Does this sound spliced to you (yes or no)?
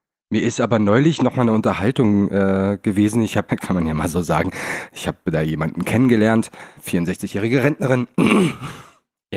yes